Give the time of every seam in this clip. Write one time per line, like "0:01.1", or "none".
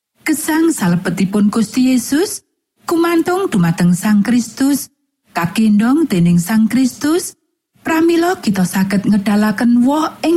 0:07.6